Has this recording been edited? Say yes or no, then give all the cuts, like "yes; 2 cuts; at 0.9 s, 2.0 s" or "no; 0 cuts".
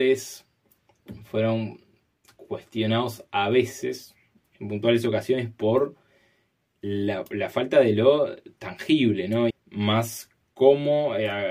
yes; 1 cut; at 9.5 s